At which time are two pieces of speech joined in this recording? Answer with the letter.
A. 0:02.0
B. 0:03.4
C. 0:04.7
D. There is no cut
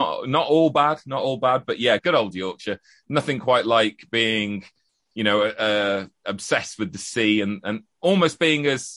A